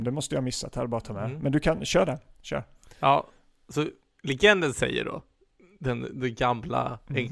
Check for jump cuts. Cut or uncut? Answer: uncut